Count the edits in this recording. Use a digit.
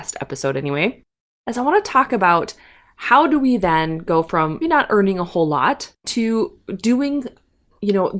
2